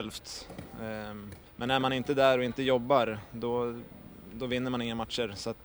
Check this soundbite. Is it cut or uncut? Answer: uncut